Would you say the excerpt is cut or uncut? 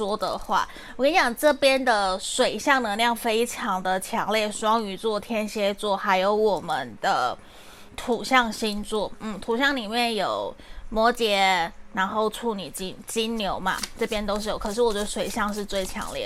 uncut